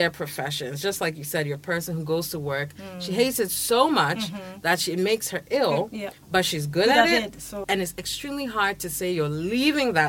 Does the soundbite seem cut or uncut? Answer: cut